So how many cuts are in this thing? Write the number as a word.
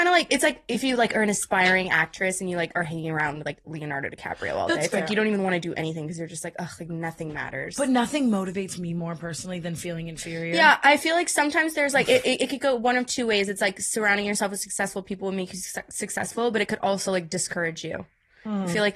zero